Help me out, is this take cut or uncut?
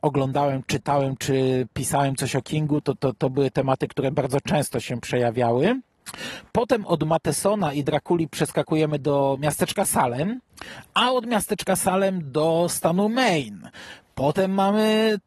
uncut